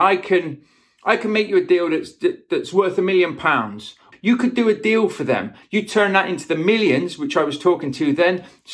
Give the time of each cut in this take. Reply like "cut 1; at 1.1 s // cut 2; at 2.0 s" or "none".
cut 1; at 4.1 s // cut 2; at 5.6 s